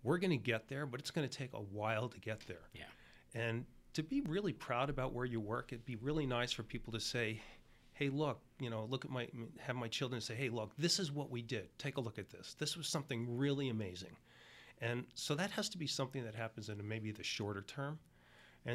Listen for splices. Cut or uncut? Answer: uncut